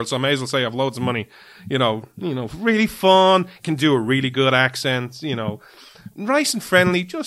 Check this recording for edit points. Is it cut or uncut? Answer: uncut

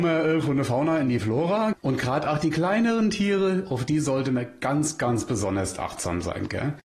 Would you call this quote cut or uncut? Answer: cut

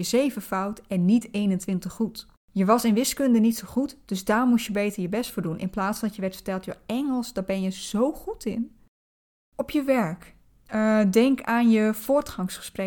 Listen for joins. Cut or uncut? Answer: cut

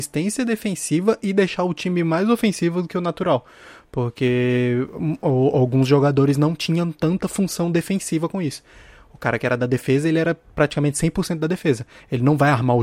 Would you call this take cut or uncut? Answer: uncut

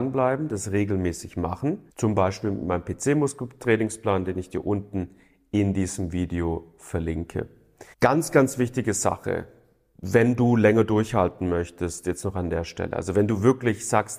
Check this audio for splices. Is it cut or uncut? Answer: cut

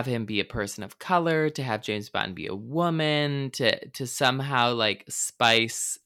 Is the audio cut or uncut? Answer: uncut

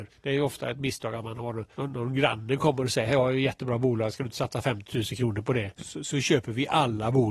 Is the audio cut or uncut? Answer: cut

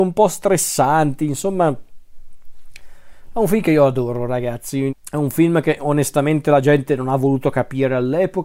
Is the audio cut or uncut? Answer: cut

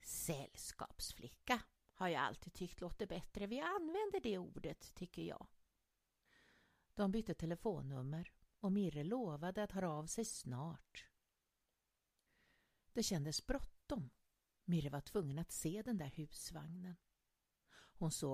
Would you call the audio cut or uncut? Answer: uncut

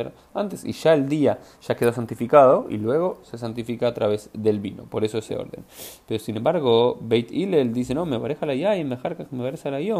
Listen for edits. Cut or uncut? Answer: uncut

